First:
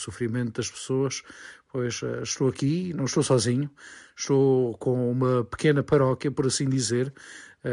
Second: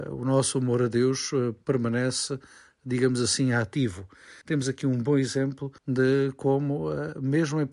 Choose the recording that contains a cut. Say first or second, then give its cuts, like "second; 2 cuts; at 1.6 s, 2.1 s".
second; 2 cuts; at 4.4 s, 5.8 s